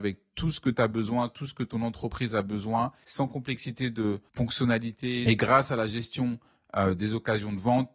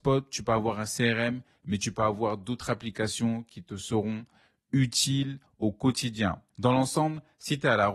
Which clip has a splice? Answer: second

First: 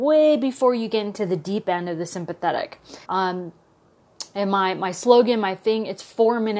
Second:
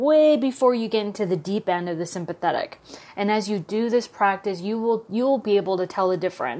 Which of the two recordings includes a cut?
first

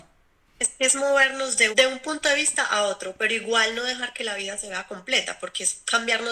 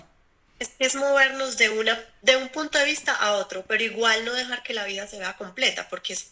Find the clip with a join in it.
first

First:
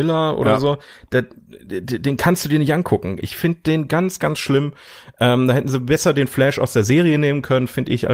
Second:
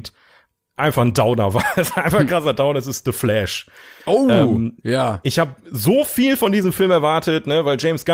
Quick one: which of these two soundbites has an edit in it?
first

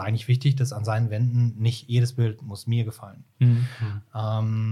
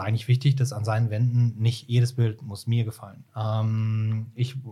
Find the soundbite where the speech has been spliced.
second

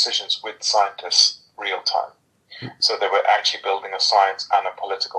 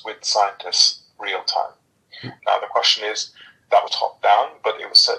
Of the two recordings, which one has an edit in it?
second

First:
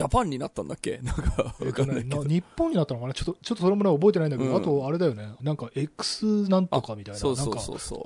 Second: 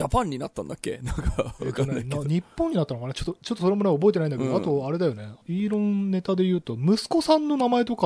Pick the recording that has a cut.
first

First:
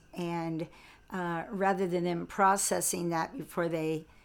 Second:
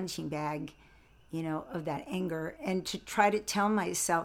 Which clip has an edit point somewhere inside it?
second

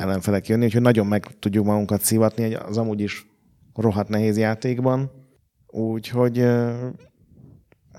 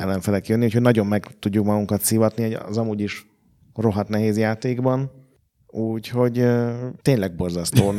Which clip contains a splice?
second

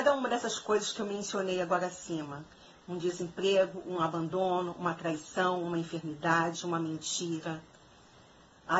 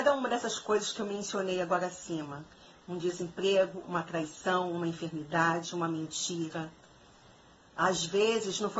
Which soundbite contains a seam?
second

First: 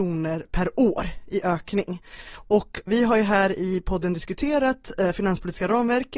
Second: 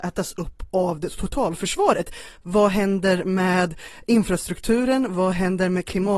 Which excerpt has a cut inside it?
first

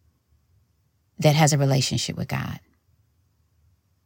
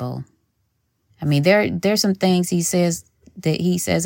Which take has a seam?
second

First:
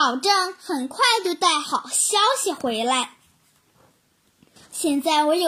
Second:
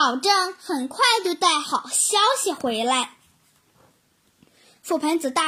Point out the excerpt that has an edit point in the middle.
first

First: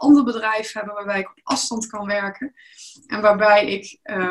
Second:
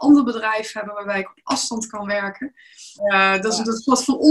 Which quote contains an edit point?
second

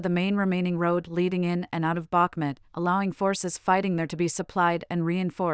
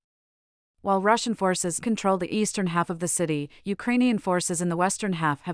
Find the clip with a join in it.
second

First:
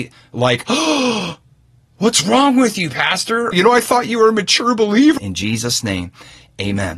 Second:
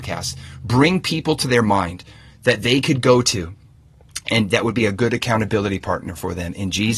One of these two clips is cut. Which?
first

